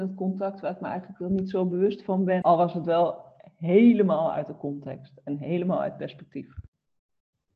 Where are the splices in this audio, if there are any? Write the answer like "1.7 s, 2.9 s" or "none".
2.4 s